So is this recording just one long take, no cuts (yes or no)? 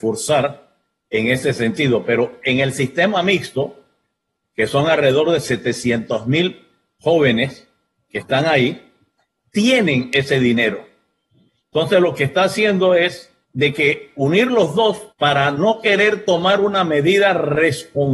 no